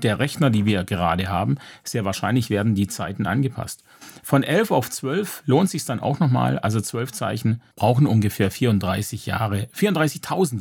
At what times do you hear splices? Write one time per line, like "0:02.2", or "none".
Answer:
0:07.7